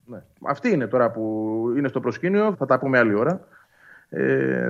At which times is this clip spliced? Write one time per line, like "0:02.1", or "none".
0:02.5